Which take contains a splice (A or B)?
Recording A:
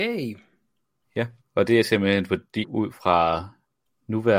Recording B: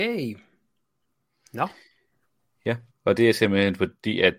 A